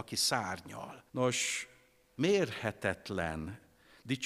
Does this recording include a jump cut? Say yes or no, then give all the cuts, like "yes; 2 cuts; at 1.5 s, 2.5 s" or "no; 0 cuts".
yes; 1 cut; at 1.1 s